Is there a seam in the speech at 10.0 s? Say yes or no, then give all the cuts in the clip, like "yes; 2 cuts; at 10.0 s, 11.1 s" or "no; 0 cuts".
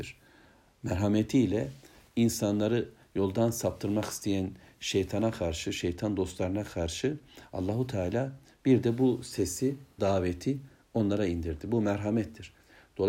yes; 1 cut; at 10.0 s